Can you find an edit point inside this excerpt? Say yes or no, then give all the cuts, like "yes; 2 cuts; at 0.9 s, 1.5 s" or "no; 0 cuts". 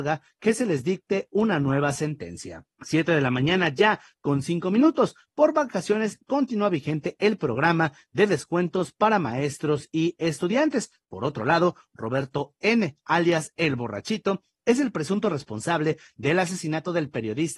yes; 2 cuts; at 2.7 s, 11.0 s